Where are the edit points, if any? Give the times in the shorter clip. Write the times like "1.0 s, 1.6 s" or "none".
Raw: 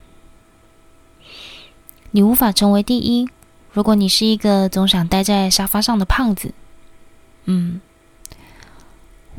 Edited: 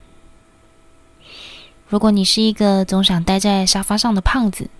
1.9 s